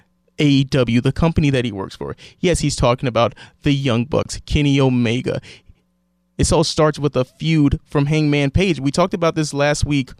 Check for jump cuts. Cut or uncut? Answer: uncut